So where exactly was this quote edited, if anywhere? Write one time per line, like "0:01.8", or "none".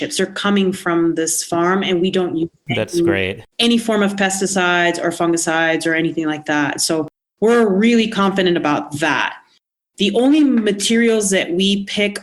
none